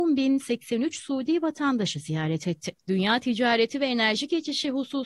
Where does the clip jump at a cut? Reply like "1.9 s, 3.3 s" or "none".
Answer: 2.8 s